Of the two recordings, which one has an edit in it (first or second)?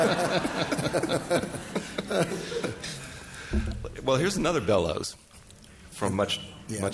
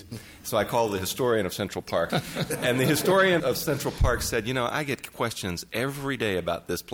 second